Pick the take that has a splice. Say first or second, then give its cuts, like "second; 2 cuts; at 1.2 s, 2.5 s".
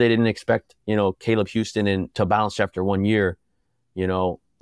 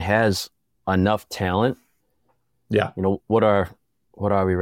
first; 1 cut; at 2.1 s